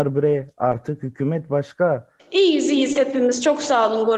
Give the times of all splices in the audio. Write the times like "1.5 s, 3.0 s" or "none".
2.2 s